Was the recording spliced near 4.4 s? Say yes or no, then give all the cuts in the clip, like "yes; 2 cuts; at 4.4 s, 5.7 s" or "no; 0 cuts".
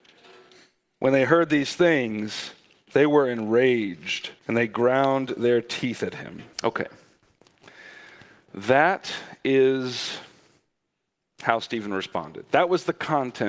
yes; 2 cuts; at 4.4 s, 6.5 s